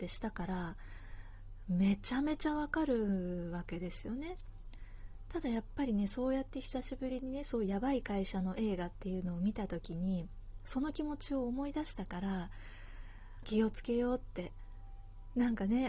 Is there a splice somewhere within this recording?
yes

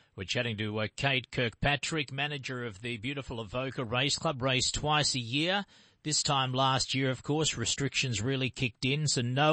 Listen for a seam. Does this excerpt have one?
no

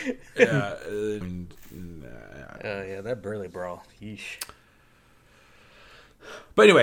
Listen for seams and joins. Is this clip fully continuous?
no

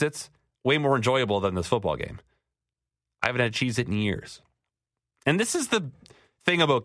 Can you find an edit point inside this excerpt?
yes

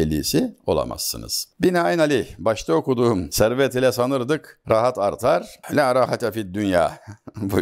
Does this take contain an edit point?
yes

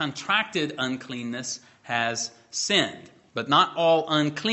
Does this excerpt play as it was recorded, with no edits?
no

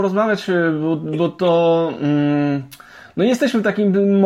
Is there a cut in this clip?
no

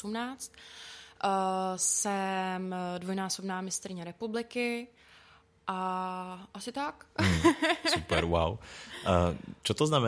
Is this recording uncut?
yes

